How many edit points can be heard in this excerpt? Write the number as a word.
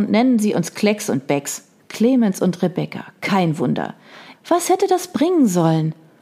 two